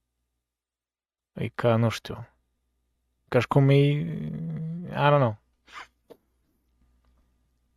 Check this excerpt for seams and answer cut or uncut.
uncut